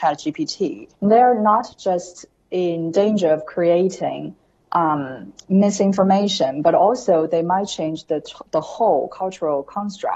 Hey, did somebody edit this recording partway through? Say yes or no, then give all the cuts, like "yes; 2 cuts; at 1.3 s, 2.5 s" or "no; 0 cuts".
yes; 1 cut; at 0.9 s